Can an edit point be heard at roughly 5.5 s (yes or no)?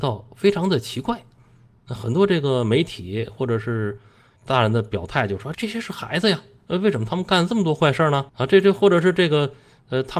yes